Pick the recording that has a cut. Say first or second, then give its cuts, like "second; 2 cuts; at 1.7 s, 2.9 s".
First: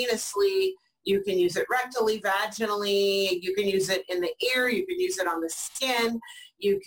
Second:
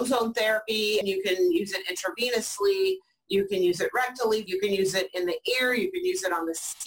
second; 2 cuts; at 1.0 s, 4.5 s